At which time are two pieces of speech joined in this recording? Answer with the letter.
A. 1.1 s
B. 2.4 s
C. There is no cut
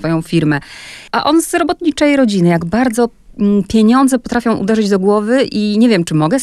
C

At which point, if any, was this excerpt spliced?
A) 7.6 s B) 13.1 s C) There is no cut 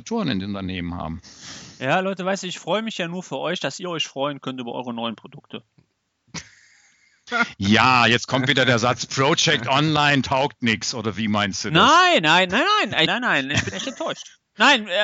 B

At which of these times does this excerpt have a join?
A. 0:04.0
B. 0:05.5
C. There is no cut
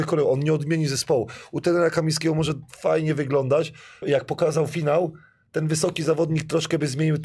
A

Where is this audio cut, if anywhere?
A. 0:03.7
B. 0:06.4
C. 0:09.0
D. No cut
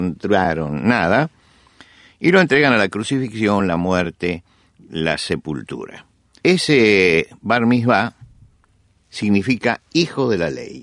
B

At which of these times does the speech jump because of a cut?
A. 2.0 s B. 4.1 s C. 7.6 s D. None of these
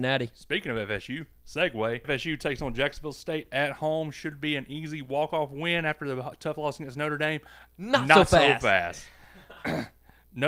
A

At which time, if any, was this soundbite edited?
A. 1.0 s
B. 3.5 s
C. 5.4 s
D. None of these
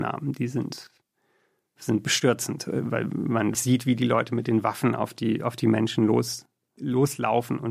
B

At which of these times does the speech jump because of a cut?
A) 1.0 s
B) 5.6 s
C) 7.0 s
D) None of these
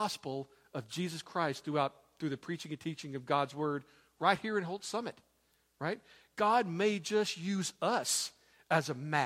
D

